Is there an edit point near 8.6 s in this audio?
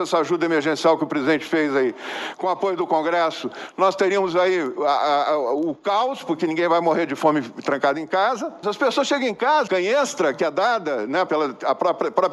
yes; 3 cuts; at 8.6 s, 9.7 s, 11.3 s

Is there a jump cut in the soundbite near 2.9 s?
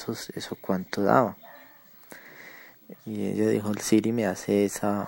yes; 1 cut; at 2.9 s

